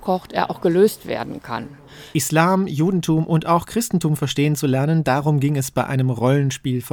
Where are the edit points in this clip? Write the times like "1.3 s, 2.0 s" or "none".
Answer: 2.1 s